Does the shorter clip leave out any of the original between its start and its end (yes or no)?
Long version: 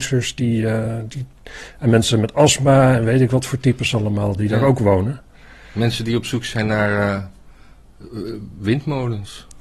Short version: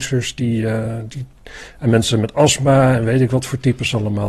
no